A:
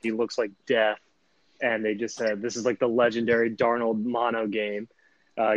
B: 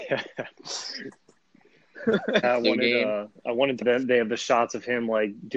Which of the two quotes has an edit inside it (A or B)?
B